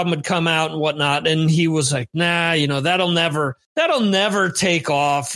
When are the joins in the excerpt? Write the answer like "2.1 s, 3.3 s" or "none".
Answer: 3.6 s